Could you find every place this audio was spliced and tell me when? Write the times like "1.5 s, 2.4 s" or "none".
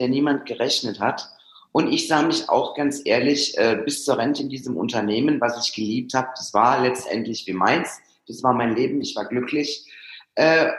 none